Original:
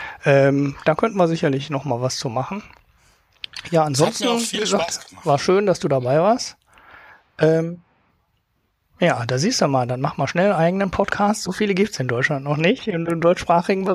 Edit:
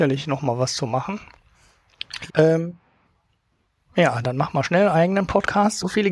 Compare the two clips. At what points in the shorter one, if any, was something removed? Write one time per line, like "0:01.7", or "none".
0:02.3
0:04.2